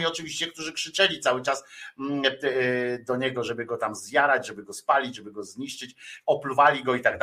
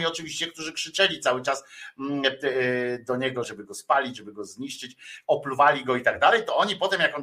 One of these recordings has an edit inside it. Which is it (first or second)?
second